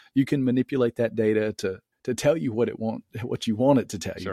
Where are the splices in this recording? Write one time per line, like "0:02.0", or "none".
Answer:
0:01.9